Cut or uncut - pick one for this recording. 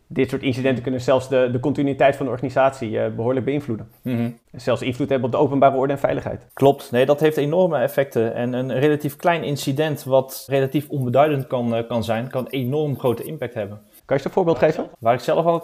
uncut